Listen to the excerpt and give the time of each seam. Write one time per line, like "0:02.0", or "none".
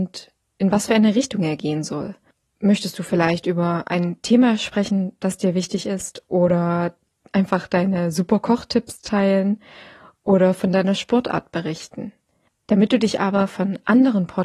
0:12.5